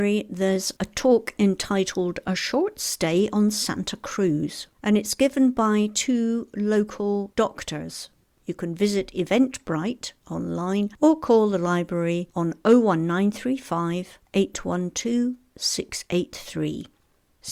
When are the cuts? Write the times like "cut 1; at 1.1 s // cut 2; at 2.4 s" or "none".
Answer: cut 1; at 8.4 s